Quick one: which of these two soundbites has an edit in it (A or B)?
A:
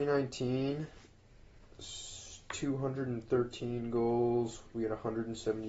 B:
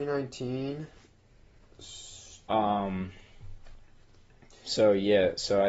B